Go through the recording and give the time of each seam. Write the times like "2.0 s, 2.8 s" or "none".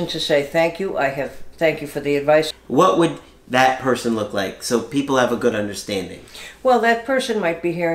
2.5 s